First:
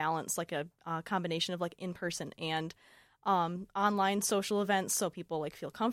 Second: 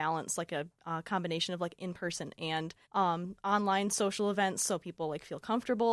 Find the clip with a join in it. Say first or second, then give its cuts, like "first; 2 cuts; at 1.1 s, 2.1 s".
second; 1 cut; at 2.8 s